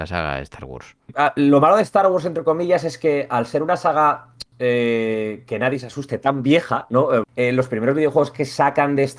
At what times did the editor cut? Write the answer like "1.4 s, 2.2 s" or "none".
7.2 s